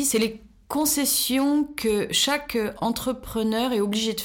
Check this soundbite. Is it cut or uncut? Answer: uncut